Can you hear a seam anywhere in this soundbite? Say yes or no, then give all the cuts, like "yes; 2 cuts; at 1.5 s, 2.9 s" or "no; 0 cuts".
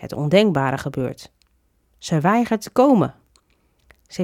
no; 0 cuts